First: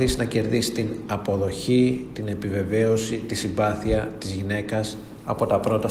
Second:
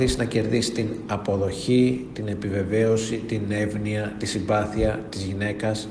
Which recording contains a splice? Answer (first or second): first